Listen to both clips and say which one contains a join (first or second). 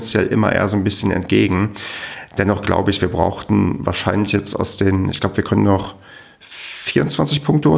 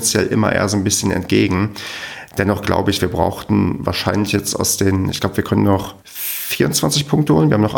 second